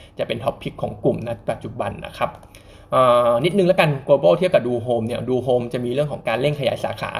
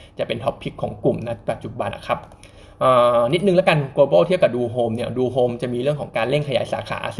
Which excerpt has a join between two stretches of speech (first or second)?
second